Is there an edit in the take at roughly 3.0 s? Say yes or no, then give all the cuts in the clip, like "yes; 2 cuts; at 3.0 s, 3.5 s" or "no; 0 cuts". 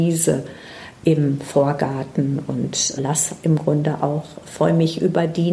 yes; 1 cut; at 3.0 s